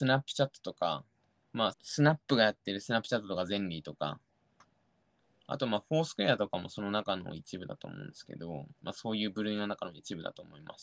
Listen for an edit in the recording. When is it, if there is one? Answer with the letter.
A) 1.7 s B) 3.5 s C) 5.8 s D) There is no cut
A